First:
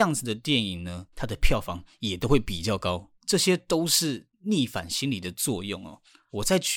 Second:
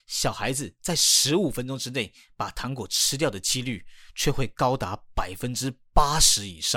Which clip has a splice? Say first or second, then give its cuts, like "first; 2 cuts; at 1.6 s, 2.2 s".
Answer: first; 2 cuts; at 1.1 s, 3.2 s